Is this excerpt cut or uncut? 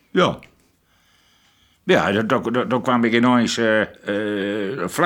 cut